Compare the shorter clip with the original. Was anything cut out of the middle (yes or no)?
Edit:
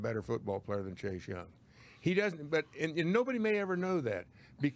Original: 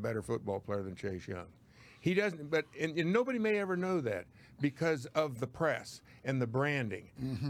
no